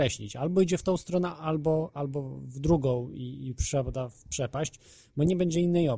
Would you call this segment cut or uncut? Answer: uncut